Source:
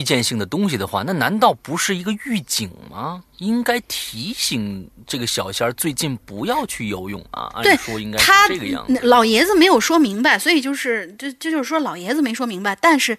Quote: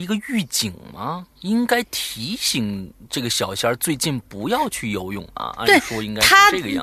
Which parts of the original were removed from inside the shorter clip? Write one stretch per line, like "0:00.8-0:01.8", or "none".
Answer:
none